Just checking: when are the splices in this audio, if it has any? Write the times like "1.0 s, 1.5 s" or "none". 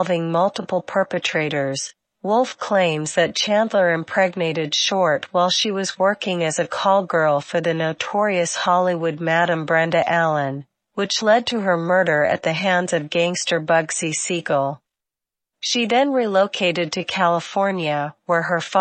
15.5 s

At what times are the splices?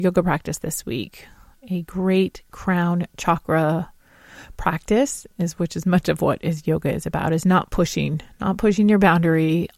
none

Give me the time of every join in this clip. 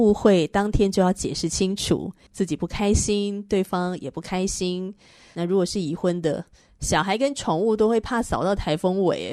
2.3 s

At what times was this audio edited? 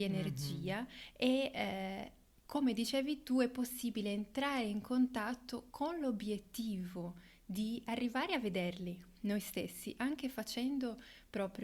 none

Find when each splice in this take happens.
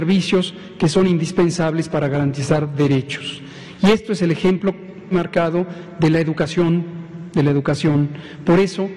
5.1 s

